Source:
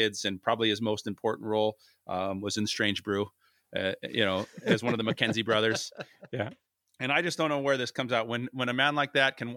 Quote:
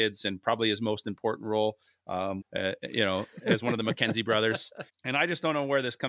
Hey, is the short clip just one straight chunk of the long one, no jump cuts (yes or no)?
no